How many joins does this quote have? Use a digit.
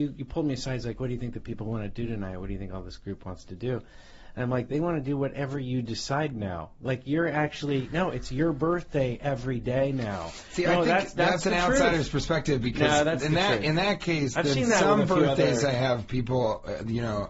0